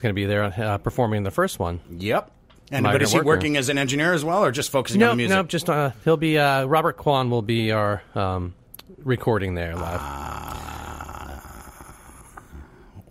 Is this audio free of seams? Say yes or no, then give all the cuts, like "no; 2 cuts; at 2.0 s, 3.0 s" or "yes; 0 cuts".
yes; 0 cuts